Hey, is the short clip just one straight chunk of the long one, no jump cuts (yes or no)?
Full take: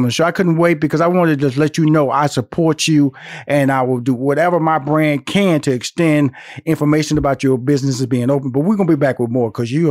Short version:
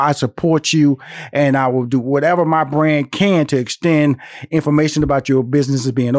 yes